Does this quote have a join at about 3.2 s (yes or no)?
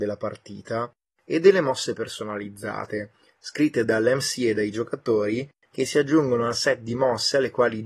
no